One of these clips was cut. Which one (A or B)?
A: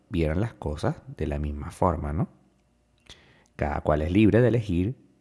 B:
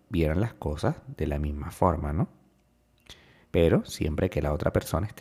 B